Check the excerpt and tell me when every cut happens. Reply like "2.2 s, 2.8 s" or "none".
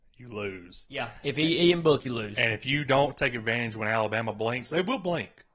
2.0 s